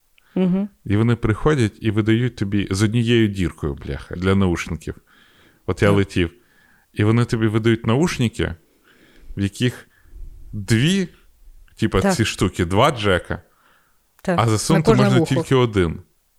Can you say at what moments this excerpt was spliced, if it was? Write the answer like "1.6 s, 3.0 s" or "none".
4.2 s